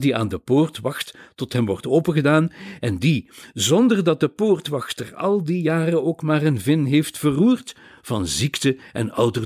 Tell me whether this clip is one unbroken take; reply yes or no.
yes